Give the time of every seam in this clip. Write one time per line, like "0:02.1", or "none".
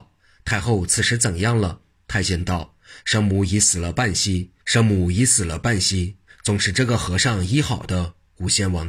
none